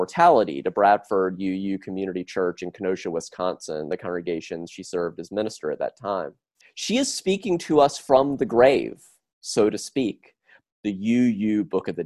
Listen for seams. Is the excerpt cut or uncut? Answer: cut